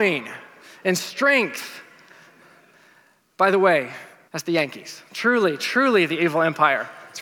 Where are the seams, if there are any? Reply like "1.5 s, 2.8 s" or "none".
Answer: 4.3 s